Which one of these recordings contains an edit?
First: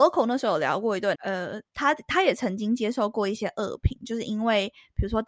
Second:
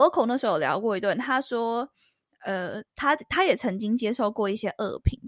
first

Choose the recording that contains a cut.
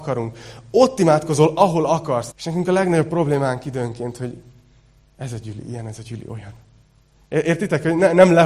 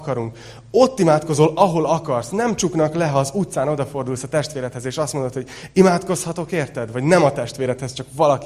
first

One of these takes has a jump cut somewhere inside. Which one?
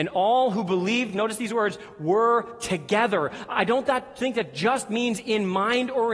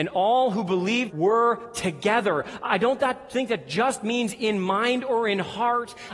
second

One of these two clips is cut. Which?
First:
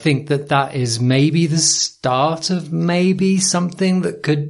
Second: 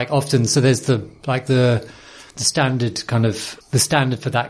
second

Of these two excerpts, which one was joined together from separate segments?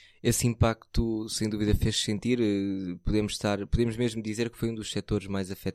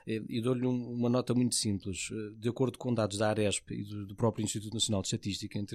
second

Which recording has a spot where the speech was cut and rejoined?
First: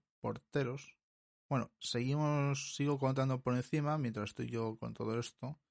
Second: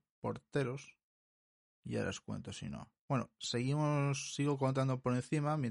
first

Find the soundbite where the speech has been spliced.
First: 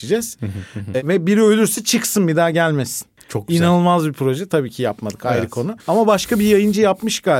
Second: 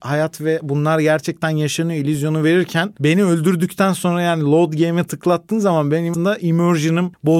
second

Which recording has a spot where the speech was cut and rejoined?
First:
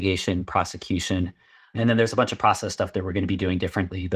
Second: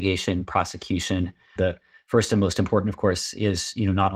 second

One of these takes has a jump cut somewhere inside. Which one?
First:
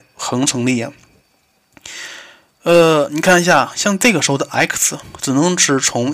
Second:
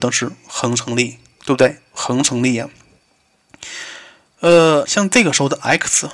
second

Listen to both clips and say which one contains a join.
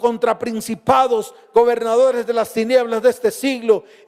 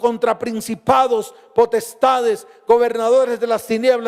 first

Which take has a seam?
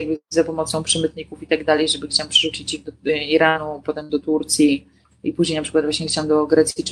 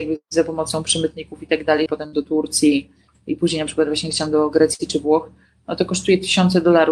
second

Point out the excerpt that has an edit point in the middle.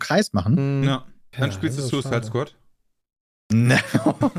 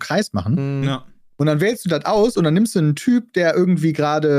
first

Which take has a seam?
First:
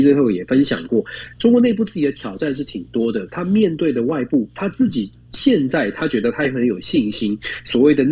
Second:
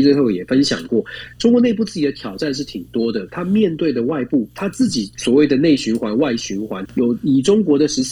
second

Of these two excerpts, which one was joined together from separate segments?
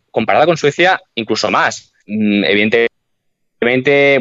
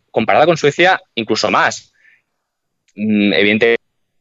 first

